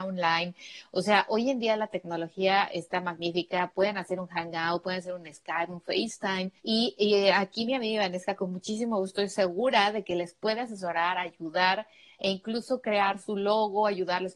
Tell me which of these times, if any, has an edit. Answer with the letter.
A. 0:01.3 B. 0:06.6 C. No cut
B